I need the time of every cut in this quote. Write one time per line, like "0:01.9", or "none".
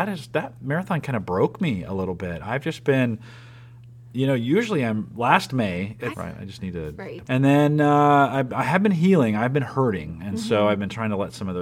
0:06.1
0:07.2